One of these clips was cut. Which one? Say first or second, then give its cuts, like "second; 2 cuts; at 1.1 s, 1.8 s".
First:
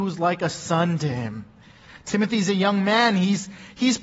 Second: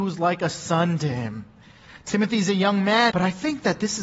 second; 1 cut; at 3.1 s